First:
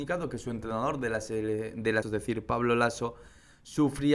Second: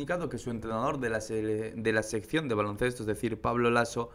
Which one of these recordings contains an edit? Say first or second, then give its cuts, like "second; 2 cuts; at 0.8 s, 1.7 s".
first; 1 cut; at 2.0 s